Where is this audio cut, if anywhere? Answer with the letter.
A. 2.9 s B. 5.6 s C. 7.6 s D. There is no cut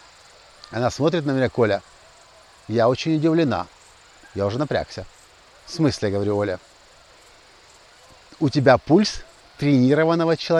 D